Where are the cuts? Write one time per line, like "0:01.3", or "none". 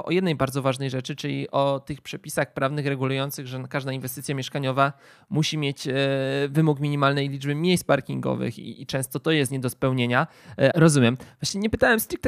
0:10.7